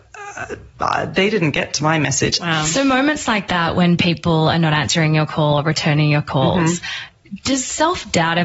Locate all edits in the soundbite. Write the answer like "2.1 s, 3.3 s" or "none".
2.4 s